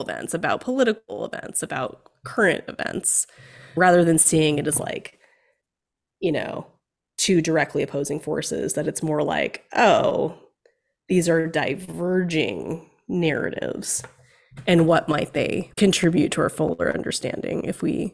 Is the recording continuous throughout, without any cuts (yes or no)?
yes